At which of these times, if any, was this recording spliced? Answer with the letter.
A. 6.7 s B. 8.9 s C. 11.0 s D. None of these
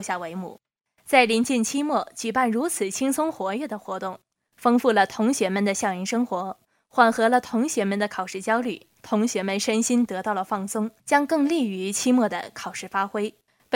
C